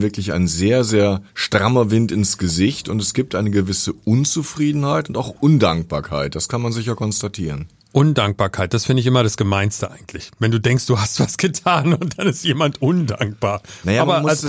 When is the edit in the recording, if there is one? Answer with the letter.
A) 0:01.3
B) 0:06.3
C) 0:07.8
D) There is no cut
A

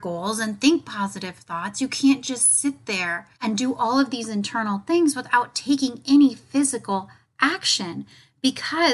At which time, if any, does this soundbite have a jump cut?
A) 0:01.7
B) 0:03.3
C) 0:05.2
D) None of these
B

